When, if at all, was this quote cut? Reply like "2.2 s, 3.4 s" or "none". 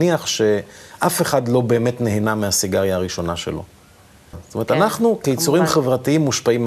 4.3 s